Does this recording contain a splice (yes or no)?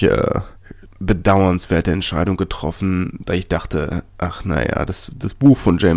no